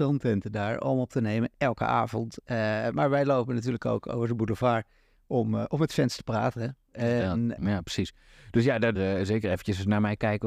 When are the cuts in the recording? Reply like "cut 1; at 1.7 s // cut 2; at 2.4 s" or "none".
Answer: cut 1; at 7.6 s // cut 2; at 8.9 s